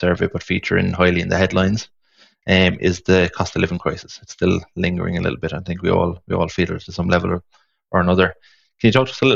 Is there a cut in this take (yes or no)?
no